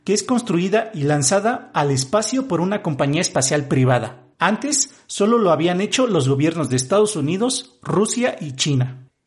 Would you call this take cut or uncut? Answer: cut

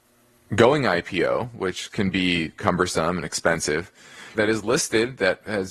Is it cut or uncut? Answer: cut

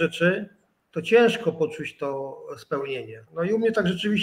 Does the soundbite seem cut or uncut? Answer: cut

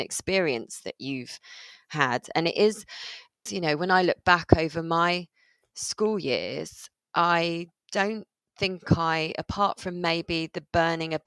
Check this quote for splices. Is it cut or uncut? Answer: cut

